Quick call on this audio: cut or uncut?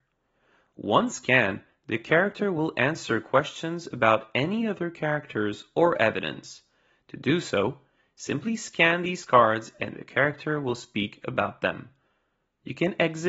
uncut